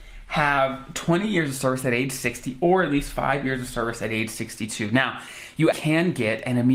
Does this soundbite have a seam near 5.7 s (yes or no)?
yes